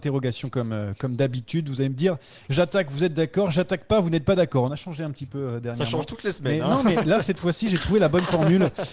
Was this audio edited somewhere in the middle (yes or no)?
no